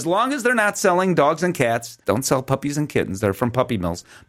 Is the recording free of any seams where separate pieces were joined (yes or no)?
no